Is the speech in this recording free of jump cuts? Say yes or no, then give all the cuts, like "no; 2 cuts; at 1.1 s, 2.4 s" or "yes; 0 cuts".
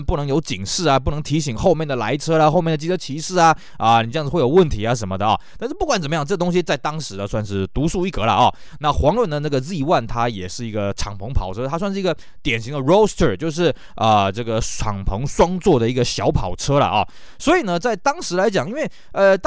yes; 0 cuts